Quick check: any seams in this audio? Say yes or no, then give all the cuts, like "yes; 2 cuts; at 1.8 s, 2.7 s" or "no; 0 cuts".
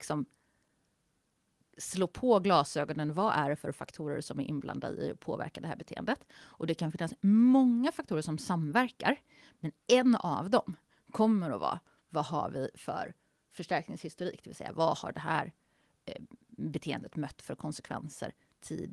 no; 0 cuts